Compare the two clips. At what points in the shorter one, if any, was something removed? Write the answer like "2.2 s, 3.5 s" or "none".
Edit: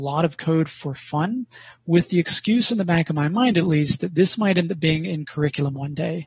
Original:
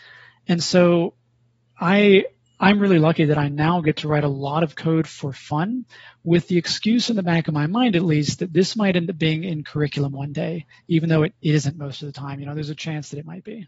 none